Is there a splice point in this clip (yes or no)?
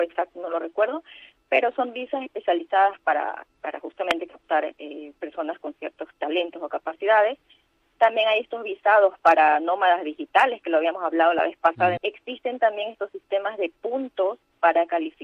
yes